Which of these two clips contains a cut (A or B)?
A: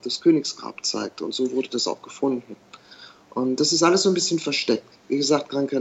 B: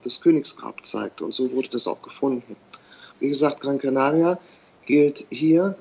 B